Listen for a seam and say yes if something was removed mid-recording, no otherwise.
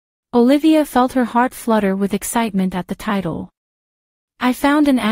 no